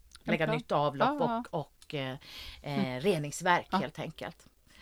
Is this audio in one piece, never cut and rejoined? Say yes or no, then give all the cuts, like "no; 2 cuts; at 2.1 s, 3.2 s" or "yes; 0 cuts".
yes; 0 cuts